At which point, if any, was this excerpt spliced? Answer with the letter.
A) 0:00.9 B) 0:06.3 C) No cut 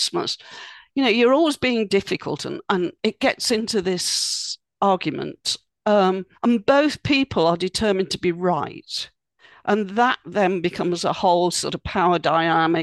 B